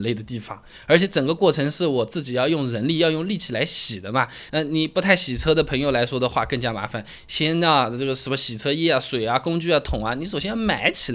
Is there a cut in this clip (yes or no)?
yes